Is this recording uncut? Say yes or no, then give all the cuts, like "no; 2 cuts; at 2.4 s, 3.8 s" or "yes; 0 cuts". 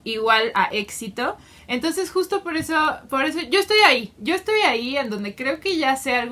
no; 1 cut; at 1.6 s